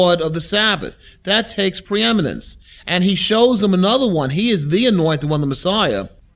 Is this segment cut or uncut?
uncut